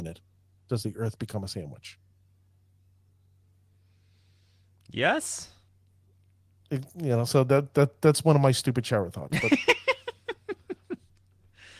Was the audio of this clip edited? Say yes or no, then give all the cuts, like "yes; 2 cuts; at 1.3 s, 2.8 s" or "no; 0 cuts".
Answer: no; 0 cuts